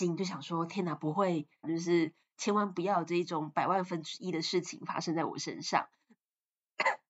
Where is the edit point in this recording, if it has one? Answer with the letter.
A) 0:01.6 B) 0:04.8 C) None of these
A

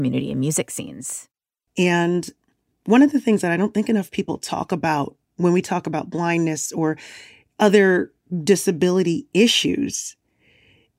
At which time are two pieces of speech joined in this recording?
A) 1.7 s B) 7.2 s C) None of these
A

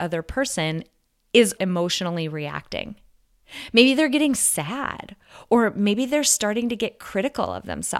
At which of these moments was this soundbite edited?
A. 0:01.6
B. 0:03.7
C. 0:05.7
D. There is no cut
A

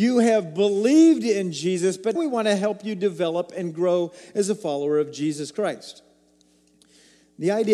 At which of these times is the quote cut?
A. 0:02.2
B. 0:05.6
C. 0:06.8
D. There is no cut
A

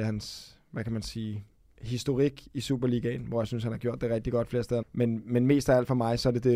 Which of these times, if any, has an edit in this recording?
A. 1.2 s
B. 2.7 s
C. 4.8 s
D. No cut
C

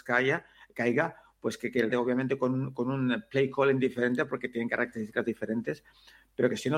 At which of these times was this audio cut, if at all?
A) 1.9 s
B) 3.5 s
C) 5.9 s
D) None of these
A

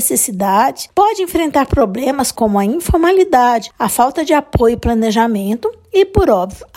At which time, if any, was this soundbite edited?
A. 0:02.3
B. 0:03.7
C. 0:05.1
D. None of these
D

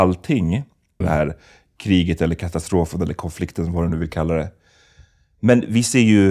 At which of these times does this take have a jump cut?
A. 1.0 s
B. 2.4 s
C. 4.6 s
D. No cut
A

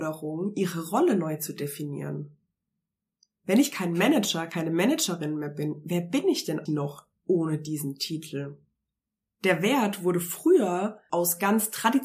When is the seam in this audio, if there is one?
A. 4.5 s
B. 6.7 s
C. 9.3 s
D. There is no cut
B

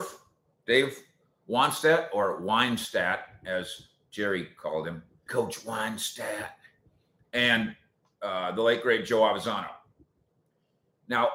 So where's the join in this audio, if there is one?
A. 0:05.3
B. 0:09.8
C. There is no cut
A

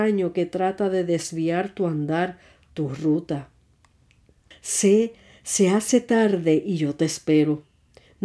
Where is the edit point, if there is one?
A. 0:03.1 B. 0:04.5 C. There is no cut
B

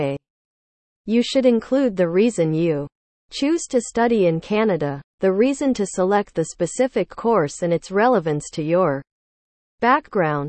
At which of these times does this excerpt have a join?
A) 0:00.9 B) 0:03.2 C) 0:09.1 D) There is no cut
D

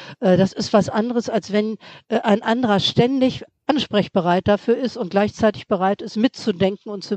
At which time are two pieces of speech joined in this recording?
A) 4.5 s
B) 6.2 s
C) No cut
C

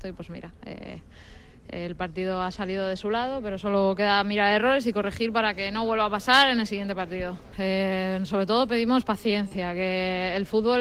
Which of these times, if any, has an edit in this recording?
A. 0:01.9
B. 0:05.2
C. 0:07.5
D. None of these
D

